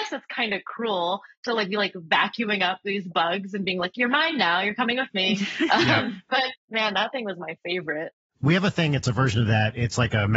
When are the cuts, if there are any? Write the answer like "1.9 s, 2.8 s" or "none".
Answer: none